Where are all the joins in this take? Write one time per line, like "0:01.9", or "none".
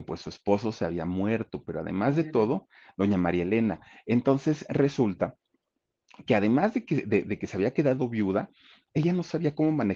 none